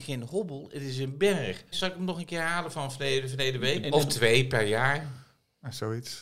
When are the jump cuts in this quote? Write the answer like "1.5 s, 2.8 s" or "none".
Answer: 1.7 s, 3.8 s